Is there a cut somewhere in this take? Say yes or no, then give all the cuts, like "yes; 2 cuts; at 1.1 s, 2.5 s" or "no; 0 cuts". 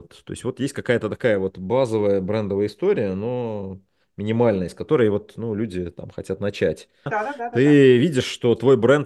yes; 1 cut; at 7.1 s